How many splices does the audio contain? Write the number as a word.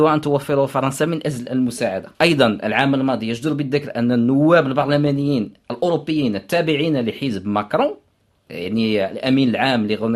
one